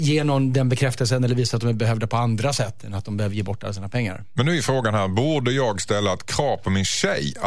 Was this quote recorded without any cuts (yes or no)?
yes